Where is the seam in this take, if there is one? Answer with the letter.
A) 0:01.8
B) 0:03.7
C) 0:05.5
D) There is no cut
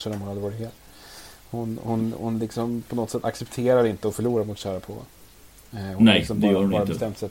D